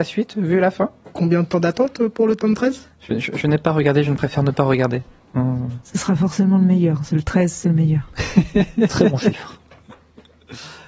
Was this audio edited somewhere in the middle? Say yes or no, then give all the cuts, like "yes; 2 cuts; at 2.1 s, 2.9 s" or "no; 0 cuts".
no; 0 cuts